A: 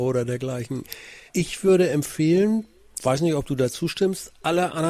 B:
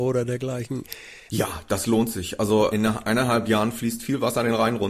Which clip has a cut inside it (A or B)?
B